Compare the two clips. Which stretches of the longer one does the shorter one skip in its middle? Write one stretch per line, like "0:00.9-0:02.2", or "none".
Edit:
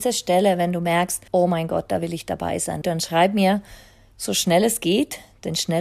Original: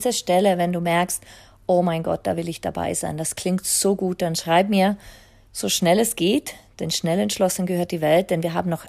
0:01.3-0:01.6
0:03.2-0:04.2